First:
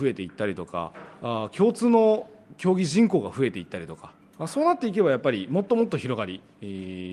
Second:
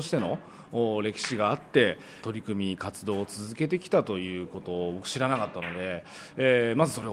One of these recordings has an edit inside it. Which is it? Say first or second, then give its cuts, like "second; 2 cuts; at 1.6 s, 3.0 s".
second; 1 cut; at 2.2 s